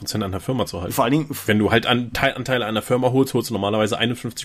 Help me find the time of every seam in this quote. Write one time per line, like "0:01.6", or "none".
none